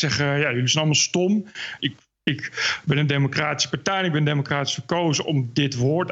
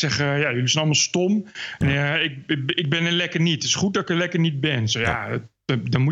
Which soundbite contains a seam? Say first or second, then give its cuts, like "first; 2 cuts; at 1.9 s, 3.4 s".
first; 1 cut; at 1.8 s